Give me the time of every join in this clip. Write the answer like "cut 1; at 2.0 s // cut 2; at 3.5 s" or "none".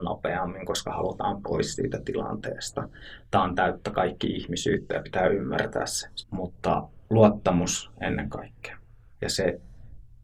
cut 1; at 6.2 s // cut 2; at 9.2 s

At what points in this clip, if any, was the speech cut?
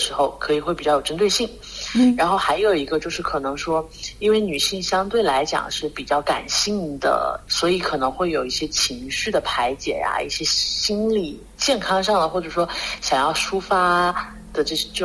none

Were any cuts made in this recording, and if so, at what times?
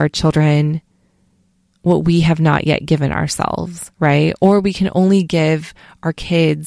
none

